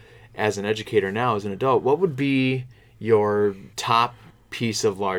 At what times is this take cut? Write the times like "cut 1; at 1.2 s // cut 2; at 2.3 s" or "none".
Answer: cut 1; at 3.7 s